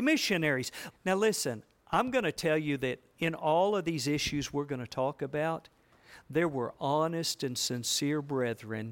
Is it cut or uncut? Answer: cut